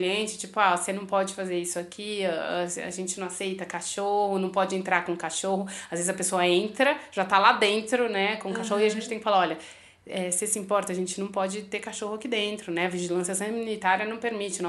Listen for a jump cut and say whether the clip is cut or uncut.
uncut